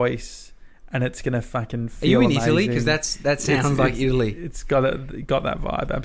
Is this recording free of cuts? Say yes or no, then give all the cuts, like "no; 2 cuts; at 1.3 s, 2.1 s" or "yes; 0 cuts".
yes; 0 cuts